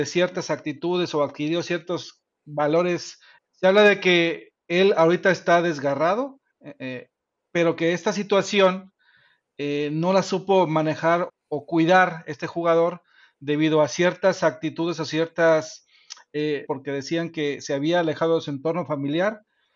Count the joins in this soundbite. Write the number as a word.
three